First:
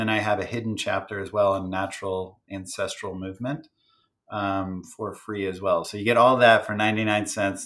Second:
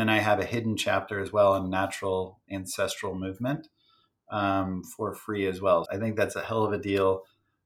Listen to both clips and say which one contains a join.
second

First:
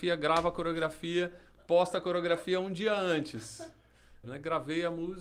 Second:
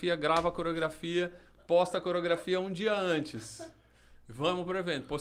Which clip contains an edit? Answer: first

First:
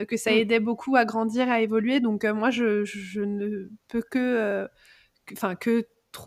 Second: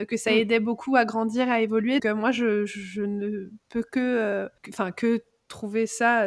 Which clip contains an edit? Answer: second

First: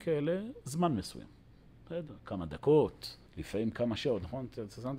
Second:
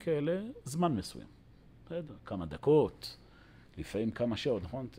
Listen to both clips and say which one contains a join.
first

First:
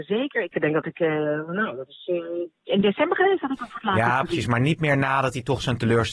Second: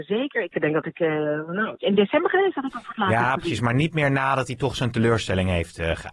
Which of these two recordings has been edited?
second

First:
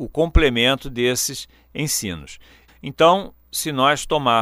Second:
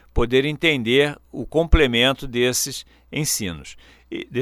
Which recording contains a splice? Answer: first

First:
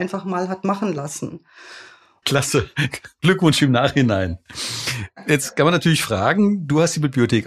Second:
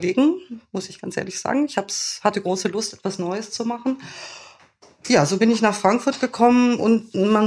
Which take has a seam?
first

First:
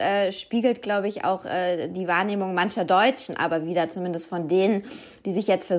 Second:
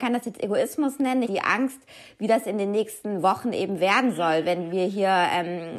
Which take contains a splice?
second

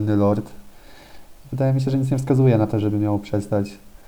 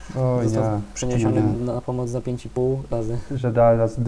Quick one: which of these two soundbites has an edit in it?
second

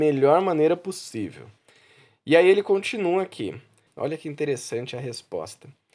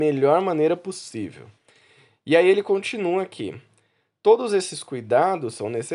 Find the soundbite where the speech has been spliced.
first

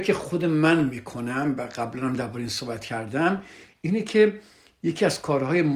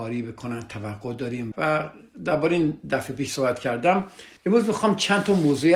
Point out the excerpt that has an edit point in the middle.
second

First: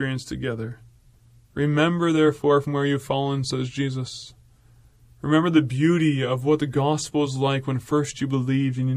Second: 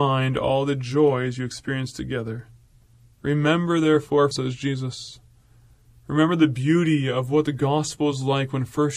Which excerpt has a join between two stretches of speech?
second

